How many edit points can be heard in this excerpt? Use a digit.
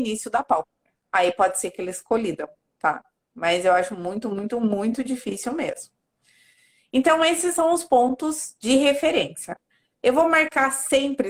1